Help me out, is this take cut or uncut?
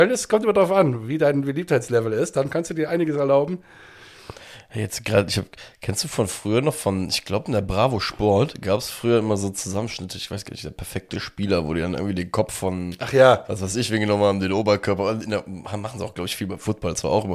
uncut